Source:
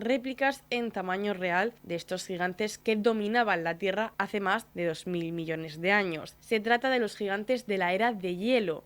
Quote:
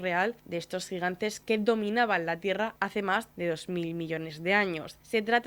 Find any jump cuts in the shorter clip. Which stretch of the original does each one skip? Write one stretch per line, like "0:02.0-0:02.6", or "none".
none